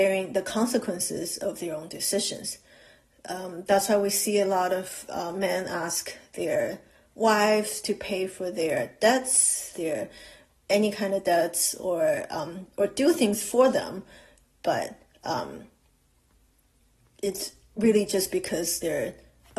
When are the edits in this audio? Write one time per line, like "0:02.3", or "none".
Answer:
0:09.7